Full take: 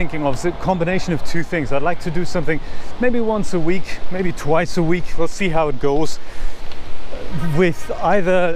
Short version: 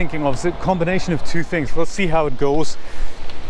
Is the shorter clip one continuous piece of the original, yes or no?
no